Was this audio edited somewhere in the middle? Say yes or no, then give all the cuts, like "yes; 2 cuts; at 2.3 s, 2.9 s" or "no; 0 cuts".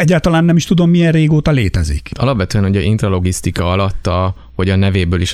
no; 0 cuts